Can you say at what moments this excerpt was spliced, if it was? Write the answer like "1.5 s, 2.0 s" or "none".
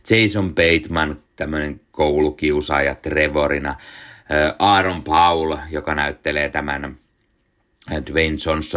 1.3 s